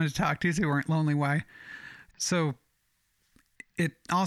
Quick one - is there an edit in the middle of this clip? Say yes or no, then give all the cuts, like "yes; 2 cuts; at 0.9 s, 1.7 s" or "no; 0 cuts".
yes; 1 cut; at 2.1 s